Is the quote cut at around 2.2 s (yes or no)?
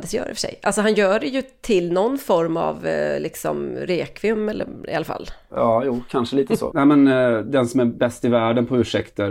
no